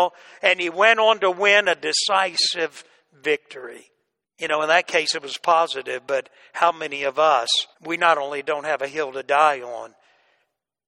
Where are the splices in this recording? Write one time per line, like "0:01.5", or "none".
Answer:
0:04.2
0:07.7